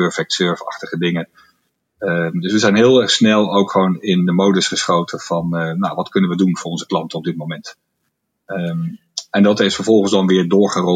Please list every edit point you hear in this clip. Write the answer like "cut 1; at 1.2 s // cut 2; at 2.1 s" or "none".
none